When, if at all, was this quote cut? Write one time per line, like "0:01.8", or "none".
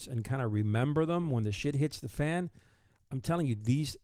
none